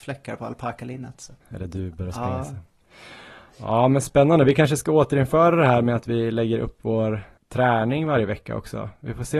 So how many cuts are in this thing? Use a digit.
1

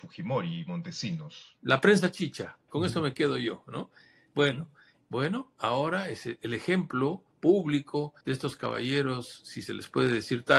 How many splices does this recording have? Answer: 3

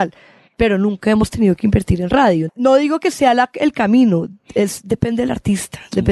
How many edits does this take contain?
1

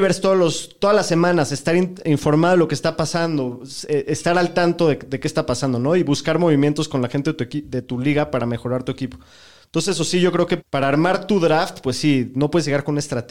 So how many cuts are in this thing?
1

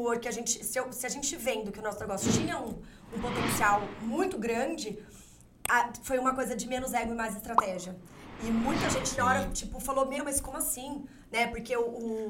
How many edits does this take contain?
0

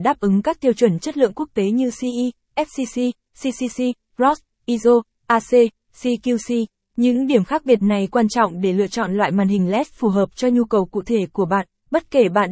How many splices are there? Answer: 2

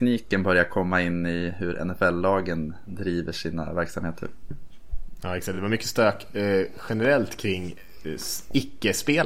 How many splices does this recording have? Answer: 0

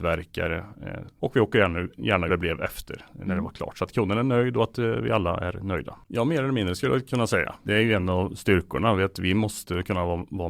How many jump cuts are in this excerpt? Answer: 3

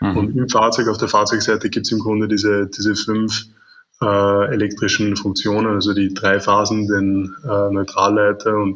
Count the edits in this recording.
0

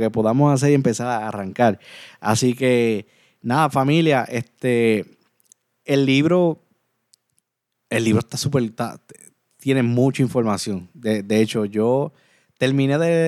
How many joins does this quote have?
0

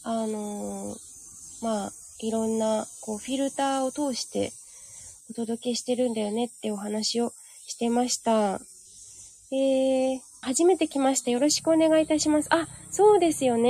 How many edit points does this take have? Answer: 1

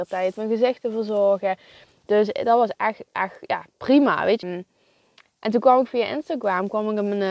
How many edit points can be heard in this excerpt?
1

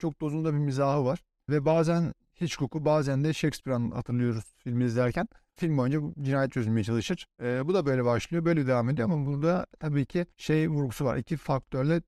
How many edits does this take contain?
1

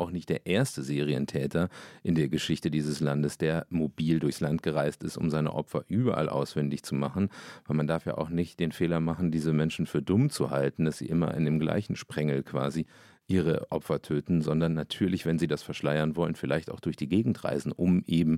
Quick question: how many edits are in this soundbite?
0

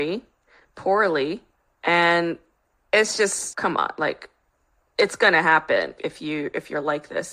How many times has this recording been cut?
2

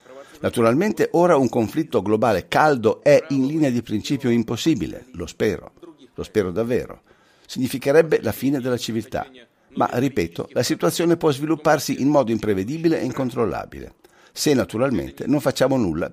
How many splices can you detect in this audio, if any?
0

